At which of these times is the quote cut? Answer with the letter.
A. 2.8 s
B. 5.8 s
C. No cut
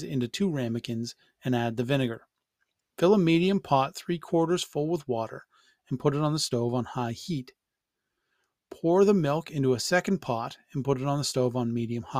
A